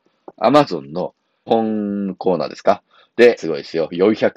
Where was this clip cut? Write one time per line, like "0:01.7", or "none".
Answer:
0:01.5
0:03.4

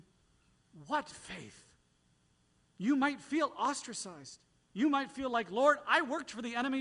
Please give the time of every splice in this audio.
0:02.6

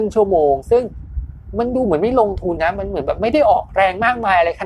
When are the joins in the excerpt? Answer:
0:02.6

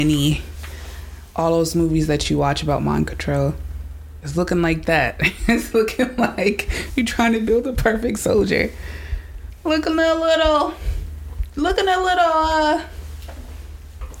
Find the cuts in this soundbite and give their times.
none

